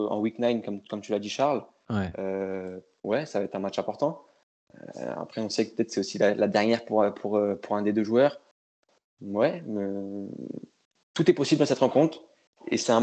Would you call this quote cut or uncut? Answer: uncut